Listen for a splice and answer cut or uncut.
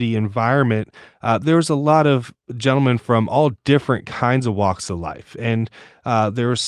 uncut